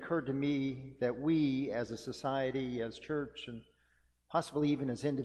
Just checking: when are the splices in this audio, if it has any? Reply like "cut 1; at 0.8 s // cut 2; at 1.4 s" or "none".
none